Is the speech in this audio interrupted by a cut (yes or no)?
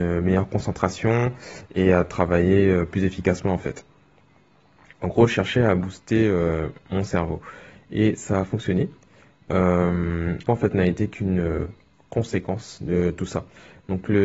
yes